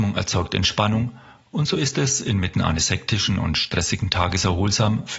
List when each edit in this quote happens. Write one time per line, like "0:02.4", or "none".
none